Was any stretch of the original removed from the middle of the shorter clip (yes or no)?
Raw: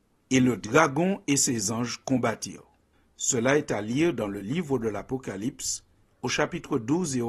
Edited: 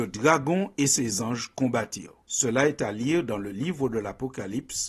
yes